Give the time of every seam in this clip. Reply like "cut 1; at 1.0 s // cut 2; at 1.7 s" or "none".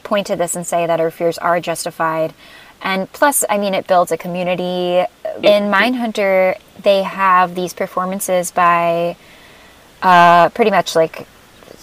cut 1; at 5.4 s